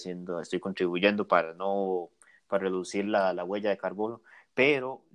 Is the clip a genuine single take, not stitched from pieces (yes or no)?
yes